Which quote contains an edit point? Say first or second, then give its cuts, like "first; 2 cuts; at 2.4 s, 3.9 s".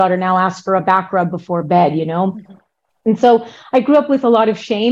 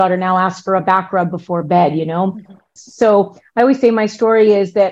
second; 1 cut; at 2.8 s